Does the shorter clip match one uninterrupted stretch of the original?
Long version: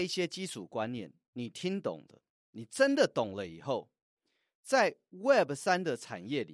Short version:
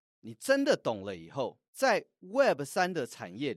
no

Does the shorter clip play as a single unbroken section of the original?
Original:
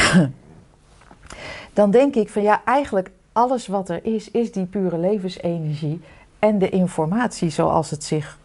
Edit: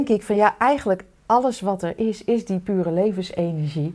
yes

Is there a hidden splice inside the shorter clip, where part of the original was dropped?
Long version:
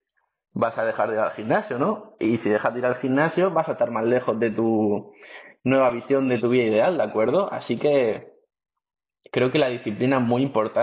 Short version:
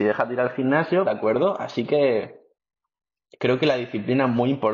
yes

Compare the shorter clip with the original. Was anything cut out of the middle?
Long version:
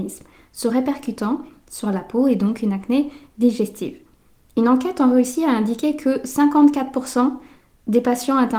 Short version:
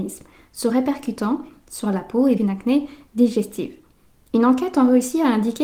yes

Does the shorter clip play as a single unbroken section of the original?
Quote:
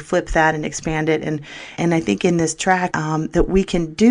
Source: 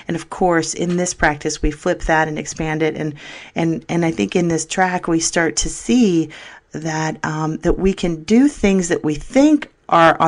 no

